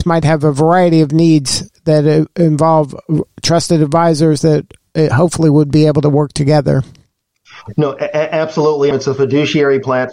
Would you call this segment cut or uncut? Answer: cut